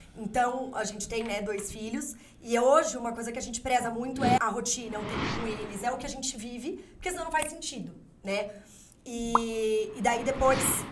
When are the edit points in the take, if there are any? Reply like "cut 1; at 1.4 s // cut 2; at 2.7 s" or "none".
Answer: cut 1; at 4.4 s